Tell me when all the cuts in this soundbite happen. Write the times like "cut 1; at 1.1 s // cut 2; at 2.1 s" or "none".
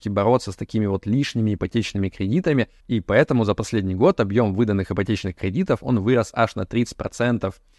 cut 1; at 2.8 s

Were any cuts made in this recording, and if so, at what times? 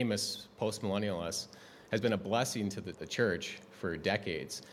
cut 1; at 3.0 s

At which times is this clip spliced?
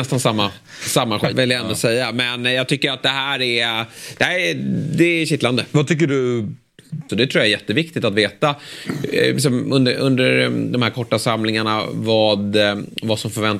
cut 1; at 1.3 s // cut 2; at 7.1 s

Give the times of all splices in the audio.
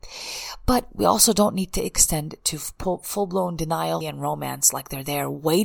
cut 1; at 4.0 s

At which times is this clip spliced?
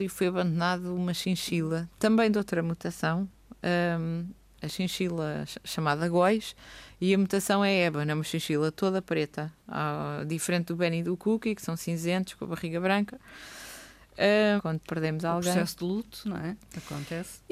cut 1; at 14.6 s

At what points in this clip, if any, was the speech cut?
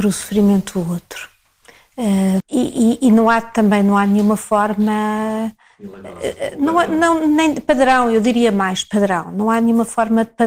cut 1; at 2.4 s

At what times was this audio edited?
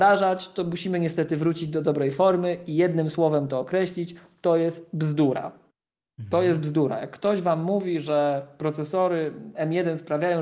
none

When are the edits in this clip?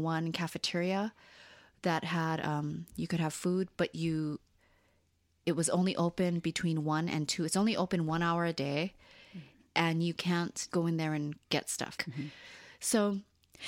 cut 1; at 10.7 s // cut 2; at 12.0 s

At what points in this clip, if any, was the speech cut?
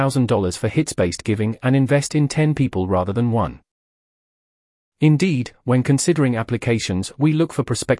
cut 1; at 4.9 s

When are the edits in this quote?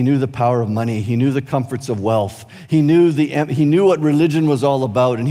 none

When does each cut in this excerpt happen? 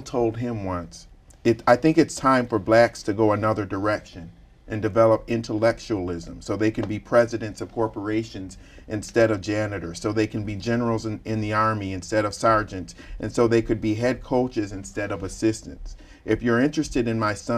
none

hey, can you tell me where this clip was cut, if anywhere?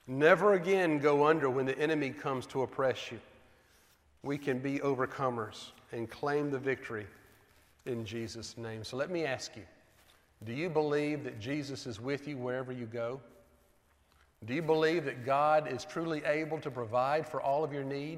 none

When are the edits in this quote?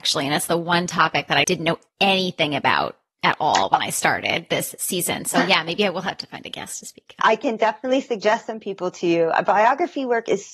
cut 1; at 1.4 s // cut 2; at 7.2 s

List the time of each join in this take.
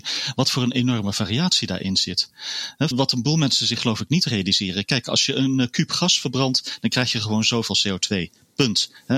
cut 1; at 2.9 s

